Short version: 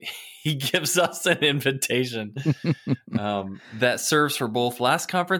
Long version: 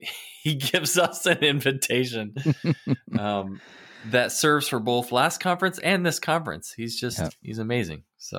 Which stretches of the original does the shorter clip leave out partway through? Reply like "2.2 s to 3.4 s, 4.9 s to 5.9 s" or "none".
3.6 s to 4.0 s